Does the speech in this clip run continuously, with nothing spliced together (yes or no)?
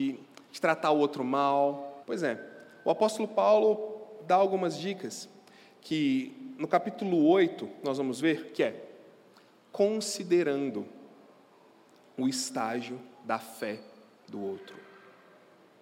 no